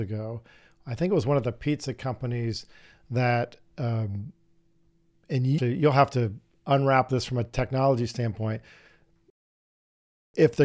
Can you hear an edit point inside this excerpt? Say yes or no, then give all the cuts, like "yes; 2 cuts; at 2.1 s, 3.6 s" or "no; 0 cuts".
yes; 1 cut; at 5.6 s